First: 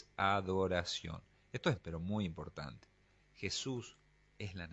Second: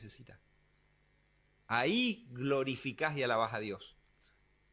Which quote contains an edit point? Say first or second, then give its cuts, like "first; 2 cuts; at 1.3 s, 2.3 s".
first; 2 cuts; at 1.8 s, 3.2 s